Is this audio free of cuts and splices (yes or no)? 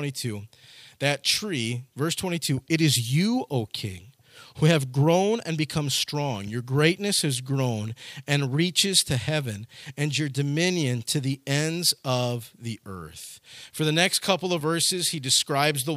yes